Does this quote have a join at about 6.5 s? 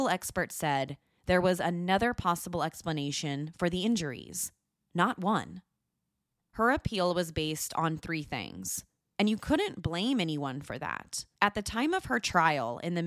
yes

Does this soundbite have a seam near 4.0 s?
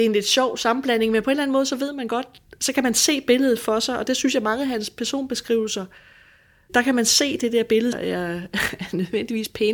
no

